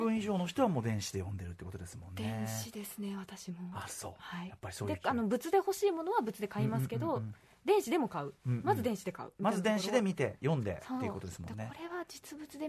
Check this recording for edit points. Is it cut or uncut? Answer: uncut